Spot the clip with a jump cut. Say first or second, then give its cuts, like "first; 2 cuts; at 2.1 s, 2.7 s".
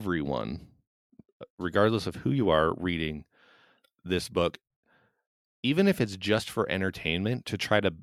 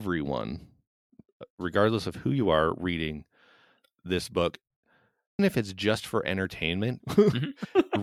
second; 2 cuts; at 5.4 s, 7.0 s